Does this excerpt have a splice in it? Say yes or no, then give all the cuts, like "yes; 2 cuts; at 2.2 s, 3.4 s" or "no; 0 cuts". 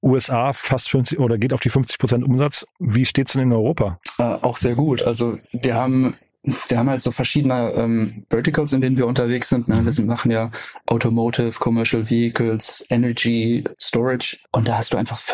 no; 0 cuts